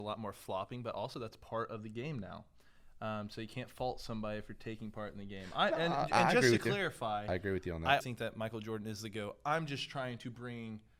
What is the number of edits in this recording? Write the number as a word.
one